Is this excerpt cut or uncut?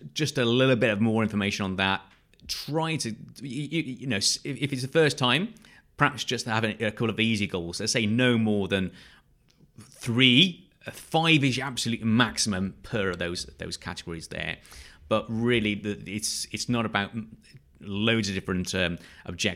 uncut